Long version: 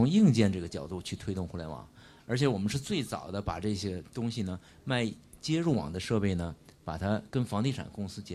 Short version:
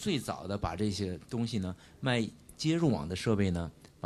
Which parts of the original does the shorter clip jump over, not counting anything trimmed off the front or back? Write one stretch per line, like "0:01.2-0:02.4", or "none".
none